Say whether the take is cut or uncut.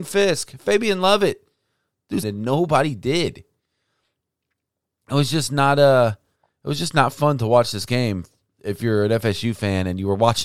cut